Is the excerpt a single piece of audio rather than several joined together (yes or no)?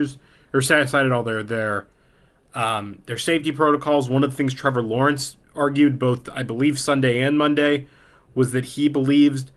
yes